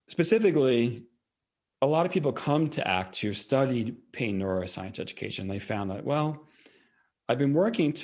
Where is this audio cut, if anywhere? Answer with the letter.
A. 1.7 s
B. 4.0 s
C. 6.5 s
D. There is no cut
D